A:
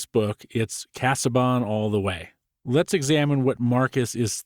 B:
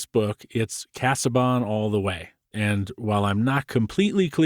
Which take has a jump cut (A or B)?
B